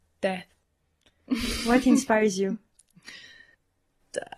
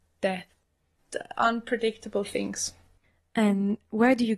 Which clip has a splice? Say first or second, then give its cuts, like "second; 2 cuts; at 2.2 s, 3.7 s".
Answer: second; 1 cut; at 1.0 s